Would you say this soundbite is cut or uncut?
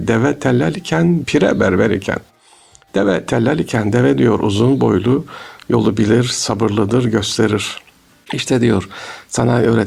uncut